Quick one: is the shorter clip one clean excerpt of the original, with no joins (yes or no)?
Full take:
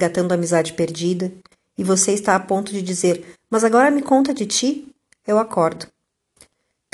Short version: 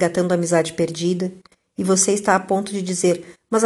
yes